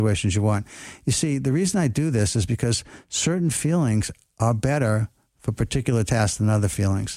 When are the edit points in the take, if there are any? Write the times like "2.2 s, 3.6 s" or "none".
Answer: none